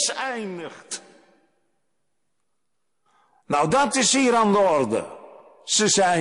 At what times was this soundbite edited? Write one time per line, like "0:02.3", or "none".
none